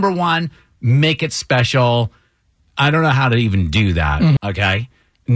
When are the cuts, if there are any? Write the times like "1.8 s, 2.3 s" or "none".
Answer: 4.4 s